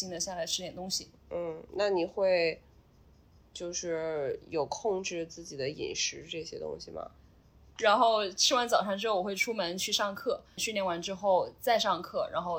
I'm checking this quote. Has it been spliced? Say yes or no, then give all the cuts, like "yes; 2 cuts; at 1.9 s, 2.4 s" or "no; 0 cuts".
yes; 2 cuts; at 7.8 s, 10.6 s